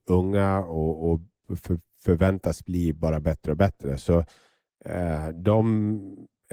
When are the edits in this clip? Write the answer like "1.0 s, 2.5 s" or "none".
none